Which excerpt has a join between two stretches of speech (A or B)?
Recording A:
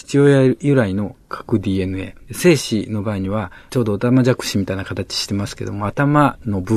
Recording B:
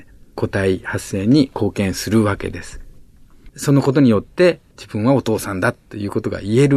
A